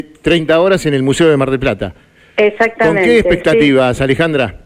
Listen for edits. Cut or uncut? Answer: uncut